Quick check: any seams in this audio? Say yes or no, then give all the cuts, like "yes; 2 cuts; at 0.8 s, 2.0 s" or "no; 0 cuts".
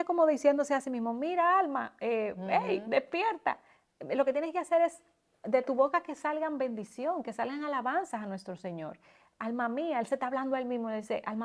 no; 0 cuts